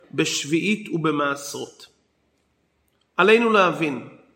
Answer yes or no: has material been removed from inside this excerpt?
no